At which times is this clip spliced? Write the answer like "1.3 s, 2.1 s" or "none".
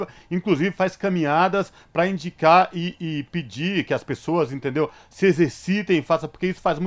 3.0 s